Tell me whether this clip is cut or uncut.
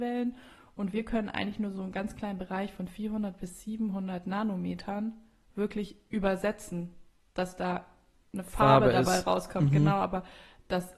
uncut